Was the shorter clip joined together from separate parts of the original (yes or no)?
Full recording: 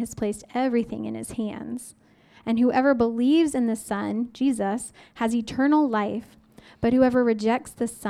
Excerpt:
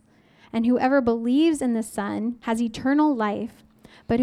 yes